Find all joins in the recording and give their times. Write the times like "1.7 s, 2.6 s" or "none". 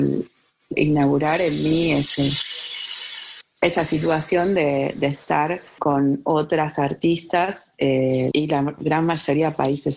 3.4 s, 5.8 s, 8.3 s